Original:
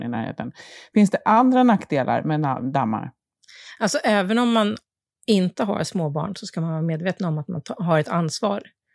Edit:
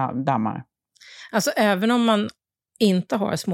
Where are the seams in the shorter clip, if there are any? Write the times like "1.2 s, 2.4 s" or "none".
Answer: none